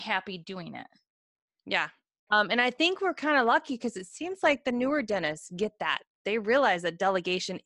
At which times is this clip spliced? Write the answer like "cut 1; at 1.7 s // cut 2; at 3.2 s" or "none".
cut 1; at 2.3 s